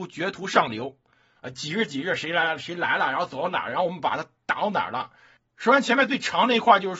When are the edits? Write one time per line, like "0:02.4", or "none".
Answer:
0:01.4
0:05.4